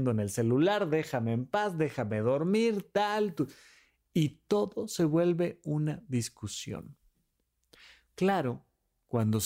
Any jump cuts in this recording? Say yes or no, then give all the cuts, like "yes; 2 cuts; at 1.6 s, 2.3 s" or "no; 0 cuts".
no; 0 cuts